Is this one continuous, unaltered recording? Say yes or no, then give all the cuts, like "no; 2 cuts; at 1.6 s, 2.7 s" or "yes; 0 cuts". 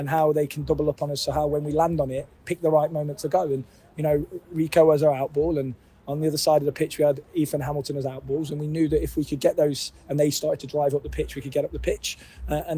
yes; 0 cuts